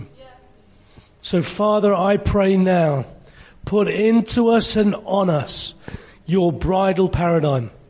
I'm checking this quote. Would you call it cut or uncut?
cut